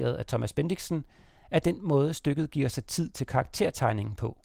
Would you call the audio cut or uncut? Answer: uncut